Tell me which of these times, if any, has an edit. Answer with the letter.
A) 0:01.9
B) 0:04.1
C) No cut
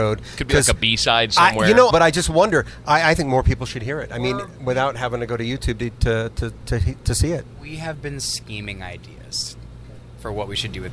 A